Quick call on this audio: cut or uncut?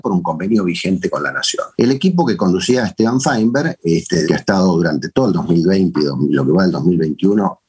cut